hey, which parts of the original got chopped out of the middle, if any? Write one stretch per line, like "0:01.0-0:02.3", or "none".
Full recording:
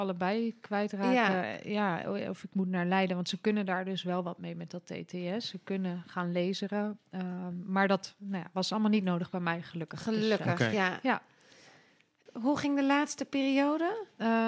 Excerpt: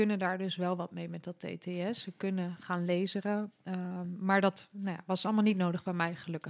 none